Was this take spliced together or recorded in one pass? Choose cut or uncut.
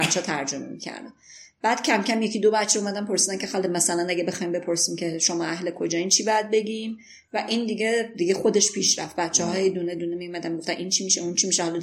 uncut